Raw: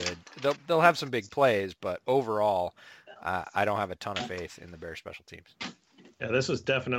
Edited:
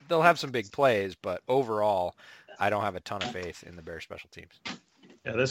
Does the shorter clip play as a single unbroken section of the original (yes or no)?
no